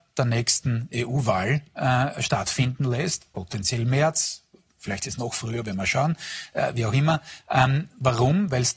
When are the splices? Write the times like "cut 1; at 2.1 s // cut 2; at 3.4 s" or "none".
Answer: none